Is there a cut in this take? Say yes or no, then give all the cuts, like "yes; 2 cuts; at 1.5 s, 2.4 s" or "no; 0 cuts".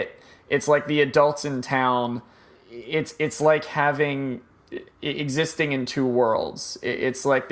no; 0 cuts